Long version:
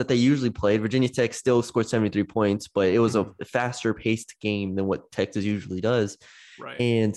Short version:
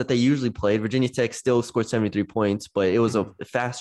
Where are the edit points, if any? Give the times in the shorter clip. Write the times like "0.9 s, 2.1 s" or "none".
none